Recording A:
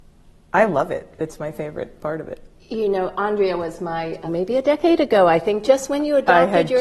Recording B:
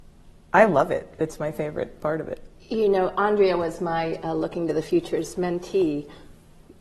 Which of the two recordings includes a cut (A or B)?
A